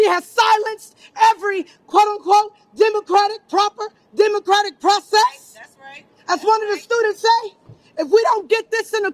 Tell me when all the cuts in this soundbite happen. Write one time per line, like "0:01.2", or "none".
none